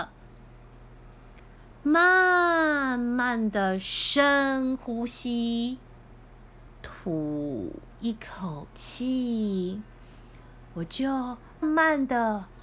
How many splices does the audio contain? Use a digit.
3